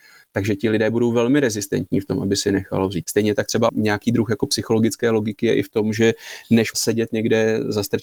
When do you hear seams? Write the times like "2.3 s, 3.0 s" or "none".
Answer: 3.0 s

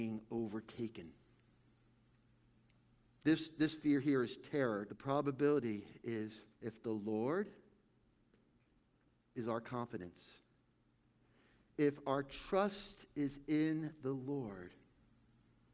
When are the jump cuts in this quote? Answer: 3.2 s, 4.9 s, 6.5 s

